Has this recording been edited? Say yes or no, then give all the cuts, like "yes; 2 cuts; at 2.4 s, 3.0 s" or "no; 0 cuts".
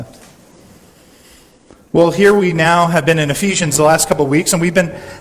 no; 0 cuts